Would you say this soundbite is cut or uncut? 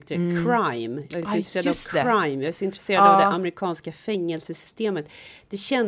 uncut